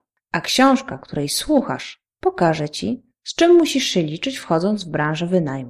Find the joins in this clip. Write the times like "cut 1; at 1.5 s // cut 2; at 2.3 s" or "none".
none